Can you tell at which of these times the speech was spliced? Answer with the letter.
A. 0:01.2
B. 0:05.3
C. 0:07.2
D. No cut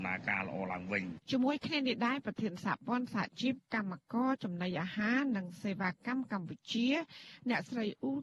A